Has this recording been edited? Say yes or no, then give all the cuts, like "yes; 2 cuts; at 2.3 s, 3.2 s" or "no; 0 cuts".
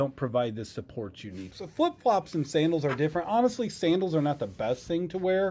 yes; 1 cut; at 1.5 s